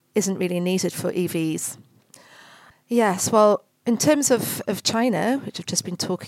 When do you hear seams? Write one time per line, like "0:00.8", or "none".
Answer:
0:02.7